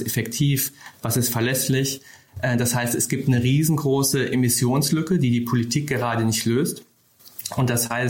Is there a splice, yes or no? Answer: yes